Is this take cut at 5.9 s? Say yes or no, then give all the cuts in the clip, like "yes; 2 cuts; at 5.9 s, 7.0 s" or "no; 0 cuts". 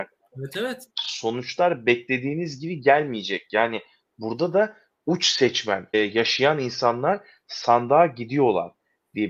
yes; 2 cuts; at 0.9 s, 5.9 s